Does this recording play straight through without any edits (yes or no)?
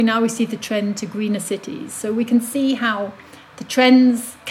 yes